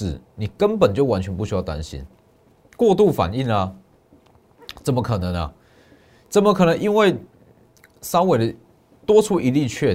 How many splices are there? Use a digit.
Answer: 1